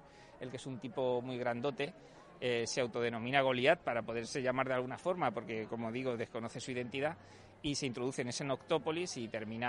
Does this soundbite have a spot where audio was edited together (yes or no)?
no